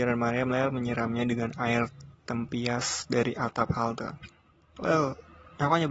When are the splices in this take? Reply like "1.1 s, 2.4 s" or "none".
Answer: 4.8 s